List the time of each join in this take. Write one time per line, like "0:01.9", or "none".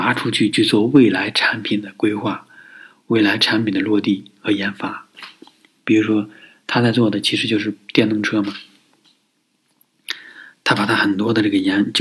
none